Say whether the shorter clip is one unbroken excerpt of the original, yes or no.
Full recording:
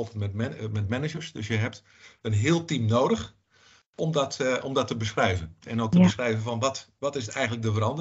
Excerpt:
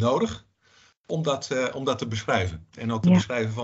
yes